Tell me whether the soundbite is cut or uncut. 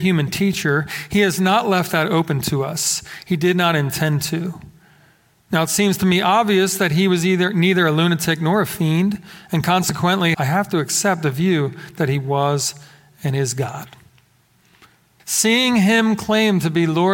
cut